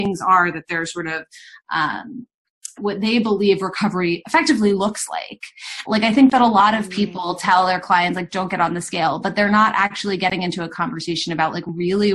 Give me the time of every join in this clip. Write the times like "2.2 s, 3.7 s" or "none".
2.8 s, 5.9 s